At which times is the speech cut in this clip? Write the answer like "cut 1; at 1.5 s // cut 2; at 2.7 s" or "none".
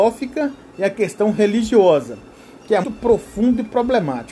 cut 1; at 2.8 s